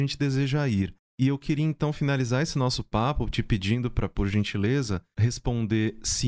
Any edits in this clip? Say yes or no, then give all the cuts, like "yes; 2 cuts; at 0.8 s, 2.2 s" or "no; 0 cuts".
no; 0 cuts